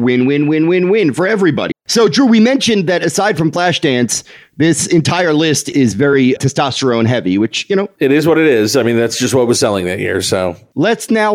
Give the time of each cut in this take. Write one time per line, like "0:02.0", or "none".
0:01.7
0:06.4